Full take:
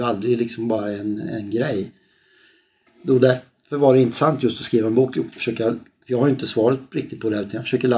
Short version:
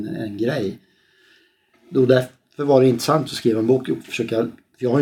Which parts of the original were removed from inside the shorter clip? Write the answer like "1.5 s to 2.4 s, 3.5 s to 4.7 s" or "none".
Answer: 4.4 s to 4.5 s